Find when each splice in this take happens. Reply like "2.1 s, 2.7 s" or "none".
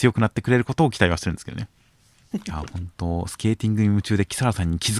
2.3 s